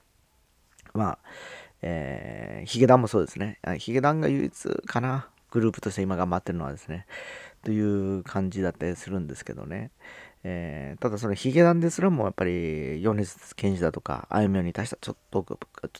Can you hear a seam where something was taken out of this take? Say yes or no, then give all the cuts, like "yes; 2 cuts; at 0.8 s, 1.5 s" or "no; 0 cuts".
no; 0 cuts